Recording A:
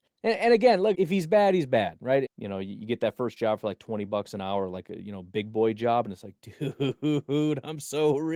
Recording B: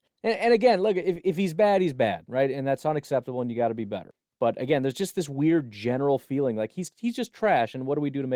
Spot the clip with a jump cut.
A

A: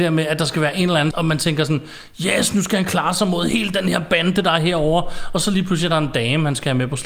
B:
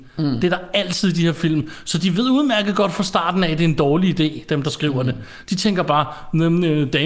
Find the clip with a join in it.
A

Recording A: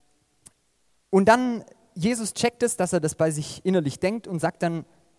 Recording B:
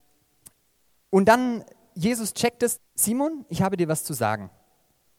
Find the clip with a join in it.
B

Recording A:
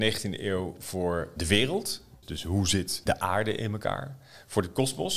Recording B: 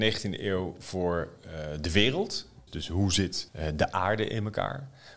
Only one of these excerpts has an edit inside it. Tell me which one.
A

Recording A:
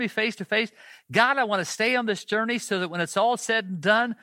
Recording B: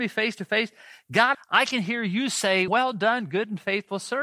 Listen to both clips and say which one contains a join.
B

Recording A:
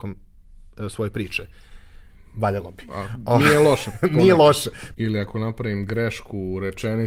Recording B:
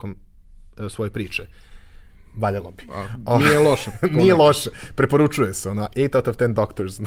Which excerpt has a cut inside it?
A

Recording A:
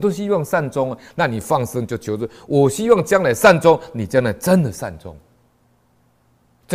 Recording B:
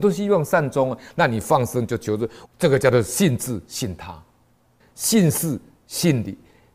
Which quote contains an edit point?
B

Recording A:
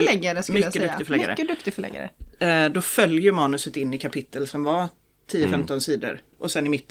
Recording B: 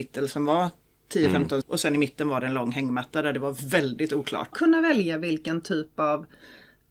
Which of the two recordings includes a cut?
B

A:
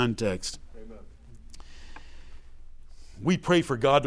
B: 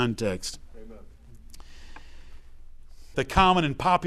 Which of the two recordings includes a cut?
B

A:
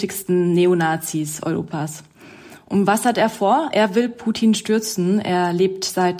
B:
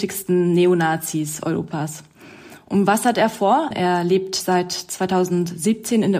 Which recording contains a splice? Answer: B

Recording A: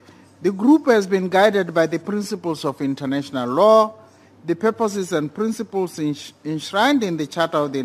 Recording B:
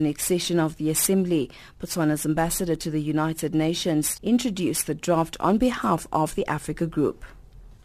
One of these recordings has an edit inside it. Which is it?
B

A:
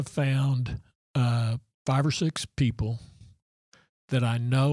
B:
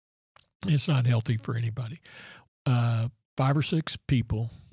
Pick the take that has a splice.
B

